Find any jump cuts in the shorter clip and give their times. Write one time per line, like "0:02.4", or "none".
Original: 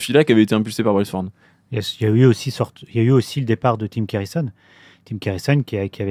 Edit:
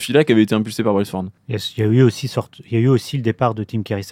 0:01.4